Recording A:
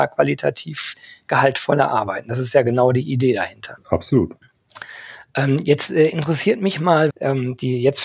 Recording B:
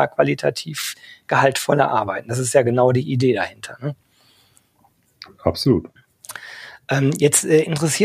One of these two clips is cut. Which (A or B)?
A